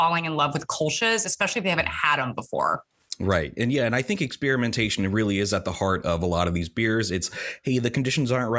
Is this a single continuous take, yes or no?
yes